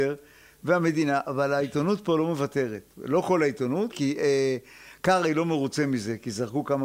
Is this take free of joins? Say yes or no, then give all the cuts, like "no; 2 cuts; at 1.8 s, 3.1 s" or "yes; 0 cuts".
no; 1 cut; at 3.9 s